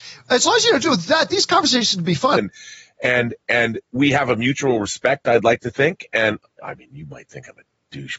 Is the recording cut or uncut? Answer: cut